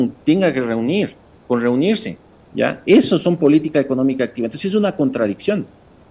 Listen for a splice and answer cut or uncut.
cut